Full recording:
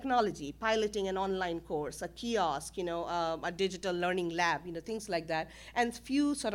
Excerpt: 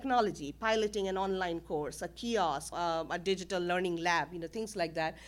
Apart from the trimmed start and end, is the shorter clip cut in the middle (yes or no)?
yes